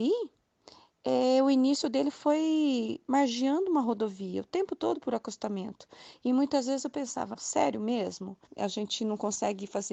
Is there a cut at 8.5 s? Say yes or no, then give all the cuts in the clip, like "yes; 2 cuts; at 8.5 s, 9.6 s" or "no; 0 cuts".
yes; 2 cuts; at 7.3 s, 8.5 s